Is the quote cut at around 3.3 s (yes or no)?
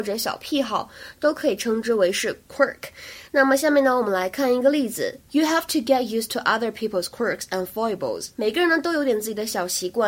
no